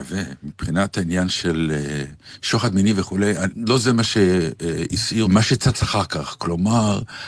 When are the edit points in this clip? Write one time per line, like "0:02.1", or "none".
0:03.5
0:05.3